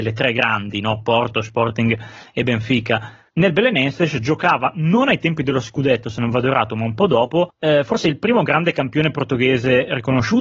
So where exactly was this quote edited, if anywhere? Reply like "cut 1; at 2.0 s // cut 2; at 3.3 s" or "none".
cut 1; at 3.3 s